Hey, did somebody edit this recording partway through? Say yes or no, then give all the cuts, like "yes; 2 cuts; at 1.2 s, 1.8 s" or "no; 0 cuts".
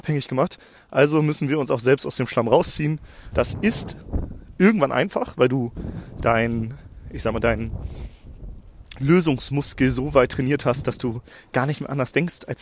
yes; 1 cut; at 3.3 s